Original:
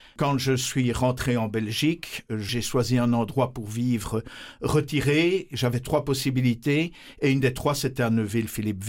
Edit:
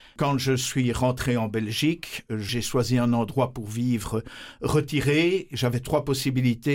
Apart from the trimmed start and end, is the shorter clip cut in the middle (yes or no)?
no